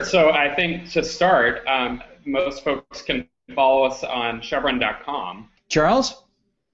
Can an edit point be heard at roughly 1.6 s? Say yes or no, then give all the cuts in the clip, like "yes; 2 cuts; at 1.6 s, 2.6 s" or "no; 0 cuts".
no; 1 cut; at 5.6 s